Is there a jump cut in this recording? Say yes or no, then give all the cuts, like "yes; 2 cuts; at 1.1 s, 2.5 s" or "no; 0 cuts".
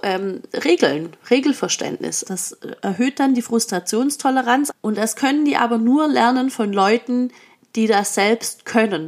yes; 2 cuts; at 2.2 s, 4.7 s